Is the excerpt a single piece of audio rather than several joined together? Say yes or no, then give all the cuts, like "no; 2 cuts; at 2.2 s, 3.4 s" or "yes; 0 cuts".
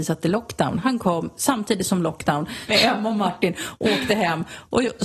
no; 1 cut; at 2.7 s